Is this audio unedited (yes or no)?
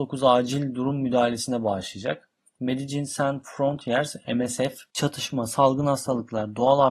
yes